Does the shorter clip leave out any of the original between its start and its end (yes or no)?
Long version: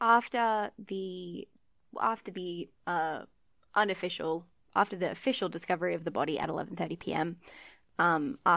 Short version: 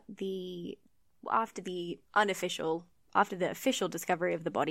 yes